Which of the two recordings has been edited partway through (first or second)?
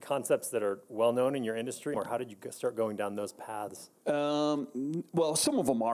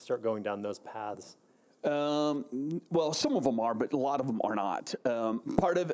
first